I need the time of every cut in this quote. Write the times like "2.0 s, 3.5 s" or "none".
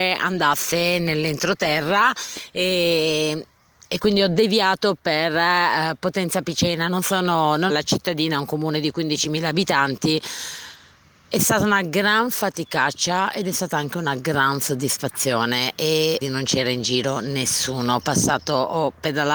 7.7 s, 16.2 s